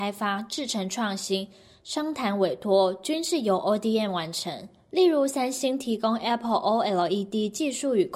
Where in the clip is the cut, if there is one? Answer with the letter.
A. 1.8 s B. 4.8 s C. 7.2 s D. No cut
D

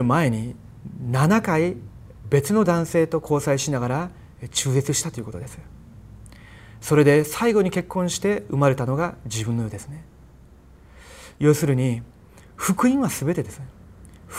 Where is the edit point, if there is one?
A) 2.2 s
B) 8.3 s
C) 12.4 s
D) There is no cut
A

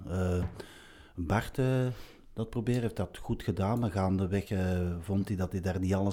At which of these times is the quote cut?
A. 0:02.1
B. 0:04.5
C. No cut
C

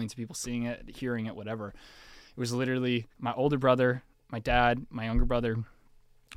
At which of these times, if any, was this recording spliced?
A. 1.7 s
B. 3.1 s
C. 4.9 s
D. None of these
B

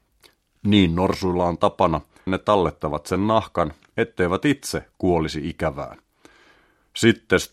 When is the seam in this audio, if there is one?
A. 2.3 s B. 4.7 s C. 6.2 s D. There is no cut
A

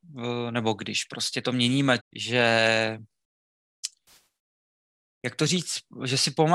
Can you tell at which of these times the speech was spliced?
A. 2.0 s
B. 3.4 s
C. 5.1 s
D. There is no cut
A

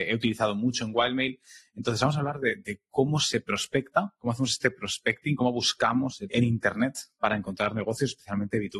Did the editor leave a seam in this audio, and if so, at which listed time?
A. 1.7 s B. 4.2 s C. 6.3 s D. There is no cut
C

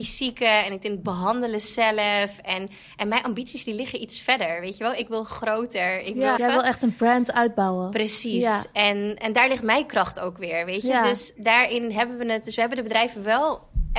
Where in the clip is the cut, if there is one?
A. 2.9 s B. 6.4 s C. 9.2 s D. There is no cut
B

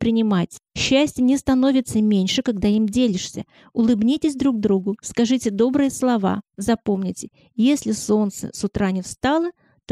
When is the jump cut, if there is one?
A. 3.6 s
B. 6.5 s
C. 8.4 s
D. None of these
B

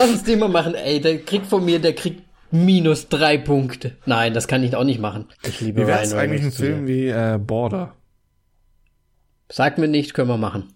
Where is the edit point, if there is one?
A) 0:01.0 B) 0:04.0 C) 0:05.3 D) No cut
C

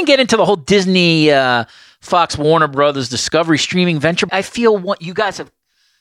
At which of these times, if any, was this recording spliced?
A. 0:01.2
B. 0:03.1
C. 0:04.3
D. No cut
C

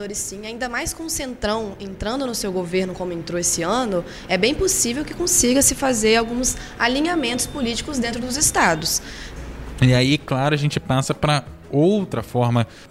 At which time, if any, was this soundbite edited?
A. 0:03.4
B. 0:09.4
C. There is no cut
B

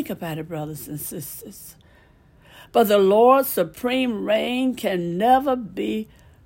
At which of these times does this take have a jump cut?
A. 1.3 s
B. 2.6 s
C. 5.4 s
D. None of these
D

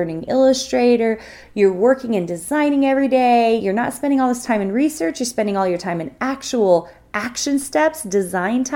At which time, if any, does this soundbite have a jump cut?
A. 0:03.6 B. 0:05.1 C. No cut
C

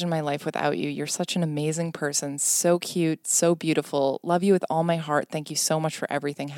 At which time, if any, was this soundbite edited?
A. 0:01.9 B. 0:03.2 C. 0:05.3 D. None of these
B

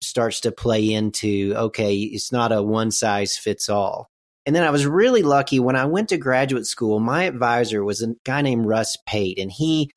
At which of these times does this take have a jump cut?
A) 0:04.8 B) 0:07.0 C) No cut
C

